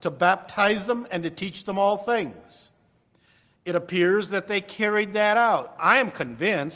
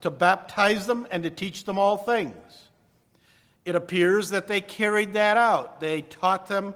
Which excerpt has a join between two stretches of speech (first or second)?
first